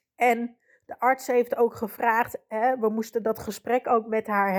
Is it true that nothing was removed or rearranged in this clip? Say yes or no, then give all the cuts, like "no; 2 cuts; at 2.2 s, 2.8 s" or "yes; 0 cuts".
yes; 0 cuts